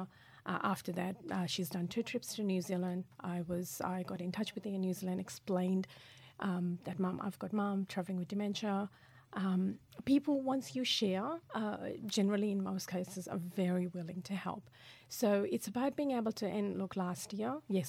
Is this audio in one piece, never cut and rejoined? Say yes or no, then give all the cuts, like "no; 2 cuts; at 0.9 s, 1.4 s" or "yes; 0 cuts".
yes; 0 cuts